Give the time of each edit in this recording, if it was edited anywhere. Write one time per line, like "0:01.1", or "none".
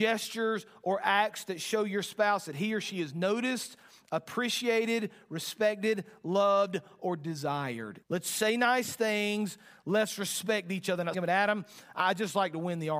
0:08.0
0:11.1